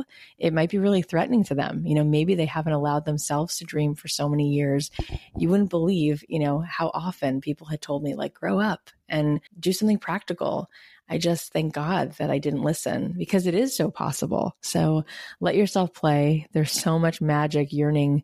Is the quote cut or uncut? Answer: cut